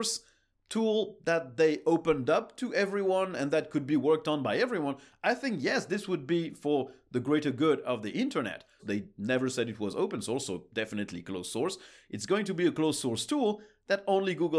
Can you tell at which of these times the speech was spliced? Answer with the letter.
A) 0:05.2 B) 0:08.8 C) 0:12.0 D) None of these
B